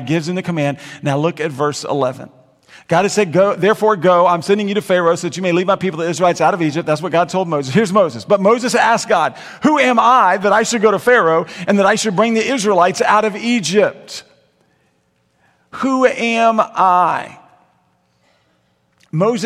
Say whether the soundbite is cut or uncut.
uncut